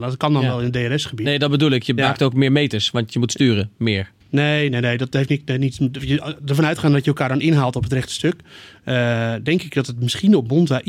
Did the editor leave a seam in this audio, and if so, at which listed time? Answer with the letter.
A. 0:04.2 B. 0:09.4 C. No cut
A